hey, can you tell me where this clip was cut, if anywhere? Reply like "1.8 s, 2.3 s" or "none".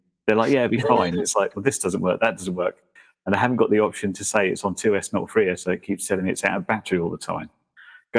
none